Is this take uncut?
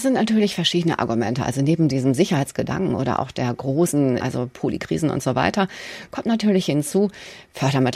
no; 1 cut; at 4.2 s

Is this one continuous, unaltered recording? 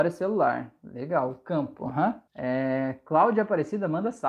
no; 1 cut; at 2.3 s

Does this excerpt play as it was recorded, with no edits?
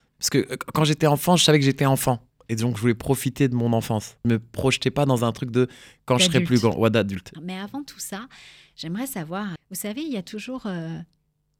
no; 3 cuts; at 4.2 s, 7.3 s, 9.6 s

